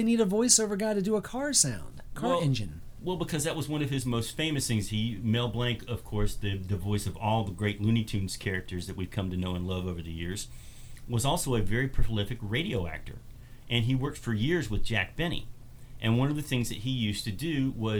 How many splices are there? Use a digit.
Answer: 0